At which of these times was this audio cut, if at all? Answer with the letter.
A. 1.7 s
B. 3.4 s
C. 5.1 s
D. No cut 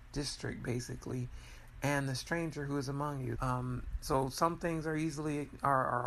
B